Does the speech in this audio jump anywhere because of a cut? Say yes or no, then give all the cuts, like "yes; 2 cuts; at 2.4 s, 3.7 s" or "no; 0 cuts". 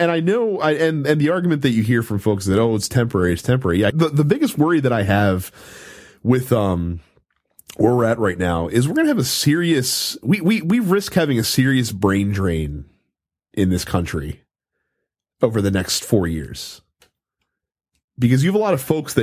yes; 1 cut; at 3.9 s